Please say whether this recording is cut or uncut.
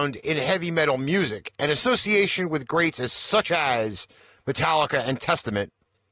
uncut